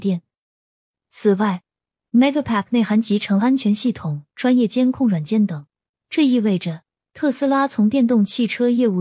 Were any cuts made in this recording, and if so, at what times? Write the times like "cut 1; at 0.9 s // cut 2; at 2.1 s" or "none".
cut 1; at 5.9 s